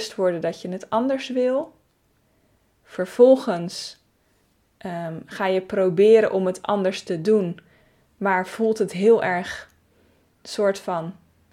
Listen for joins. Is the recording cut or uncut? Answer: uncut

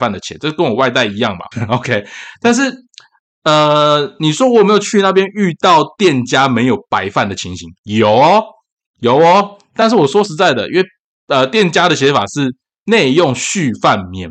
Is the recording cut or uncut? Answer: cut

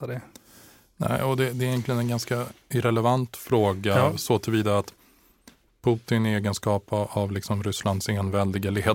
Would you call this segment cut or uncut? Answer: uncut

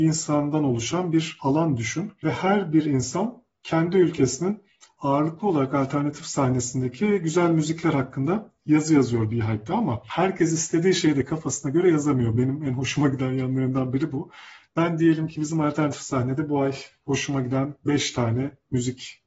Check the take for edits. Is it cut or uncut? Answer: uncut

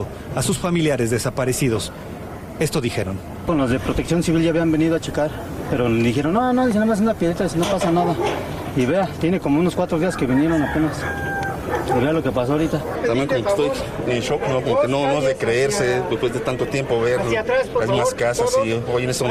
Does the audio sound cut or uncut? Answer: uncut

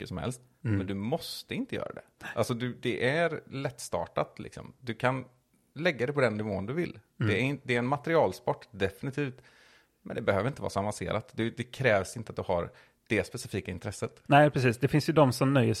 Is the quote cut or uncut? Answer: cut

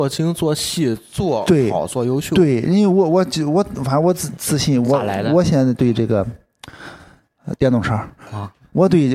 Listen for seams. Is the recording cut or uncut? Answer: uncut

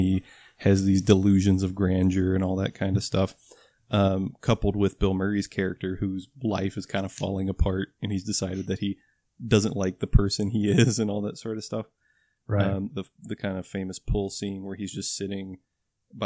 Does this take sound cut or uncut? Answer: cut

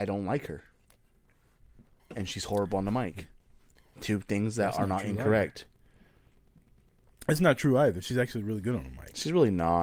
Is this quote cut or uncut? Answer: uncut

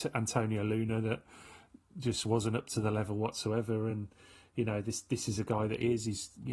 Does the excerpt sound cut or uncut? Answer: uncut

